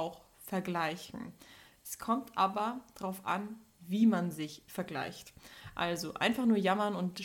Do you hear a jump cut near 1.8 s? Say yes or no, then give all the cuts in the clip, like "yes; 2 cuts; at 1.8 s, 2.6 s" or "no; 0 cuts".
no; 0 cuts